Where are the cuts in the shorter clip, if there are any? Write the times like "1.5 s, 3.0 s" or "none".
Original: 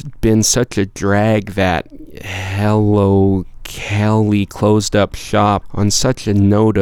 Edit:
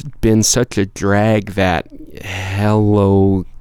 none